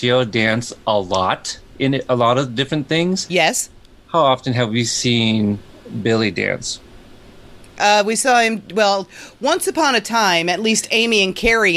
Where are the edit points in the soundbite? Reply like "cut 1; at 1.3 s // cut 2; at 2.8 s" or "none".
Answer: none